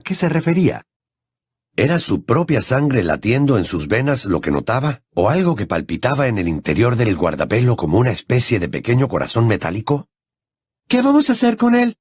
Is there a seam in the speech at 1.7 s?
no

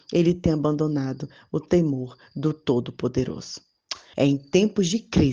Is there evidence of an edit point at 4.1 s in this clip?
yes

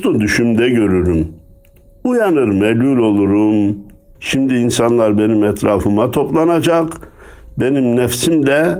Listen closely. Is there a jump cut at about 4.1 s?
yes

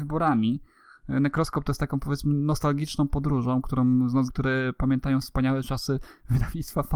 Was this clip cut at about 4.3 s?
yes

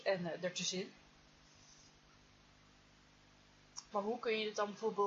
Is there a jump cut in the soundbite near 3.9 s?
yes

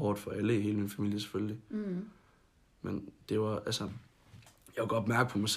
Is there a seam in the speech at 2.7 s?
no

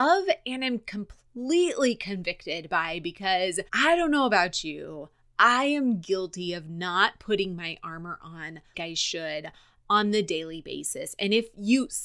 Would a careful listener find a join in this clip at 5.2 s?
no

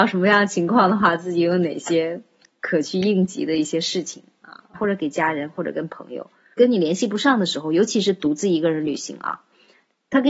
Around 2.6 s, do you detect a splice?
no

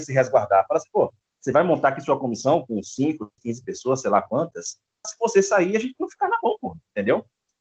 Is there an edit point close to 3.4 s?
yes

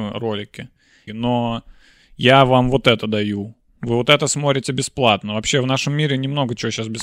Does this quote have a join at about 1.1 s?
yes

